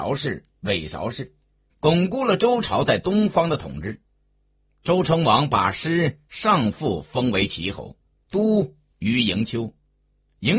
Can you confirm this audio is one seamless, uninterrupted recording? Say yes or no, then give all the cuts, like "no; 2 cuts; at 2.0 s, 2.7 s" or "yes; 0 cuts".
no; 2 cuts; at 1.7 s, 8.2 s